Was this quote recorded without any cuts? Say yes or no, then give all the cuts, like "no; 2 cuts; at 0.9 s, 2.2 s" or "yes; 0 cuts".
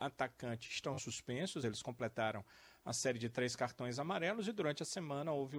yes; 0 cuts